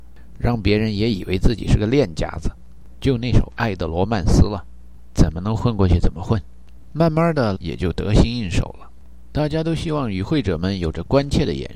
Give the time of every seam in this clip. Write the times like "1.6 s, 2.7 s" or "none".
7.5 s, 9.3 s